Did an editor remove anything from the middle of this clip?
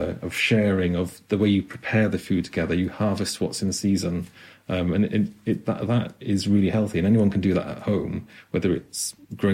no; 0 cuts

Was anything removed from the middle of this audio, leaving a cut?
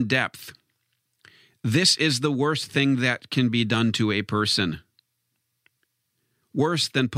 no; 0 cuts

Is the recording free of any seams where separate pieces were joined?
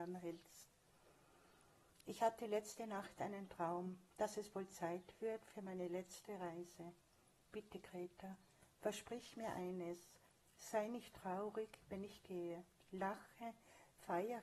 yes; 0 cuts

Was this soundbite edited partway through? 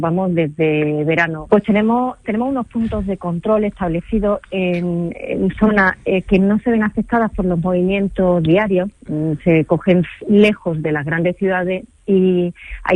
yes; 1 cut; at 1.5 s

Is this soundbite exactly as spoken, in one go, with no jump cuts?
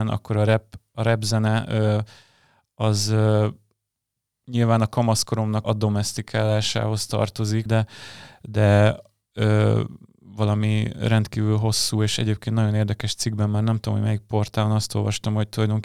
no; 2 cuts; at 5.6 s, 7.7 s

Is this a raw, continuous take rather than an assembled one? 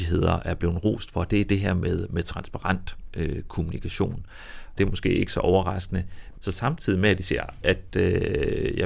no; 3 cuts; at 4.8 s, 6.3 s, 7.6 s

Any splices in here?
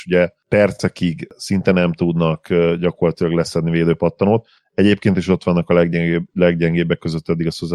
no; 0 cuts

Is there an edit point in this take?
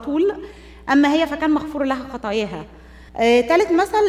yes; 1 cut; at 3.1 s

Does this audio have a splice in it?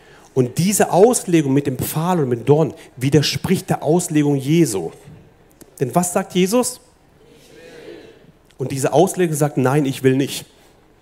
no; 0 cuts

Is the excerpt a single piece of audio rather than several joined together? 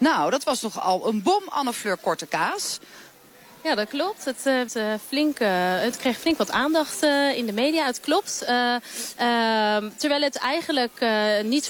no; 1 cut; at 4.7 s

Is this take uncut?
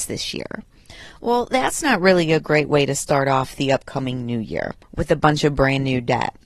yes; 0 cuts

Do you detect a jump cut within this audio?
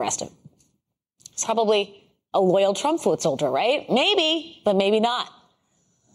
yes; 1 cut; at 1.4 s

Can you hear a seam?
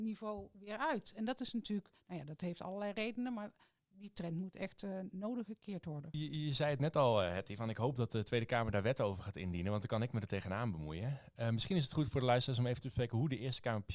no; 0 cuts

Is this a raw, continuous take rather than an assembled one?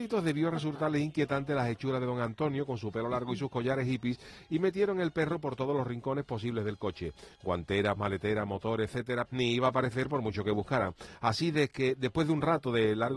no; 2 cuts; at 8.0 s, 9.3 s

